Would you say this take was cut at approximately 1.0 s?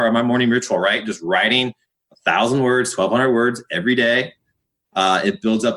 no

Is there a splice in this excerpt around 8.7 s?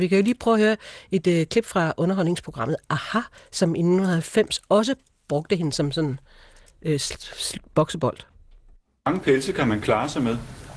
no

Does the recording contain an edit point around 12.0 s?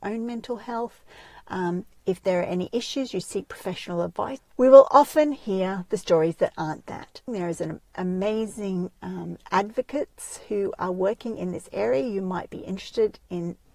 no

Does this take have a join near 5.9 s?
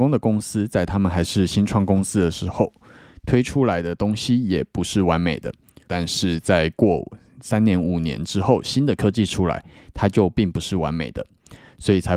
yes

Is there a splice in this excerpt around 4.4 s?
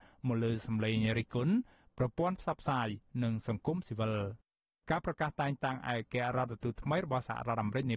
no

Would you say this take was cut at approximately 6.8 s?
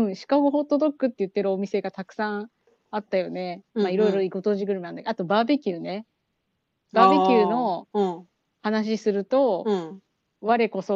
no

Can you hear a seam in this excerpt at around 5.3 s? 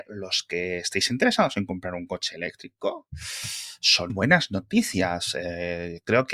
no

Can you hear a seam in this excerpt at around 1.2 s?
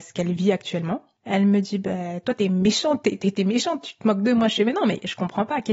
yes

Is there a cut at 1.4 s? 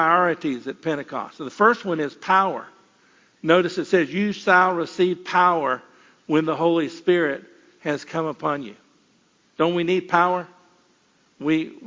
no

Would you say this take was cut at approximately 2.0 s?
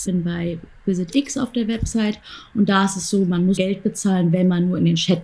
no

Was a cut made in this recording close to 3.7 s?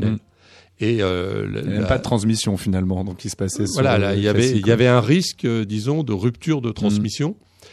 no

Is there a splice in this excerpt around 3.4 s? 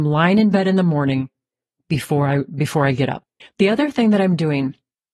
yes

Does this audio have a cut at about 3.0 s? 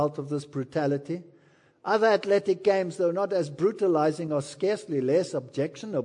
no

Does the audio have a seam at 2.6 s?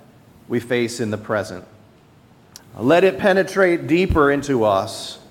yes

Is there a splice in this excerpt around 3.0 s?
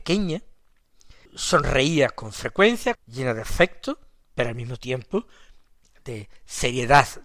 yes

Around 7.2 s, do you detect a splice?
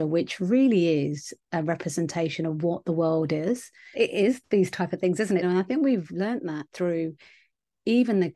no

